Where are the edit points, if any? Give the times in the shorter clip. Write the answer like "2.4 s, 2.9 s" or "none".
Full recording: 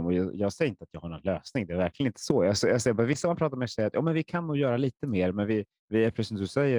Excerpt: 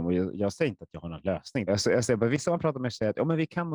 1.7 s